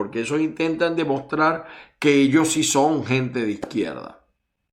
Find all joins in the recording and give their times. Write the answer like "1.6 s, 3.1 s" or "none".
none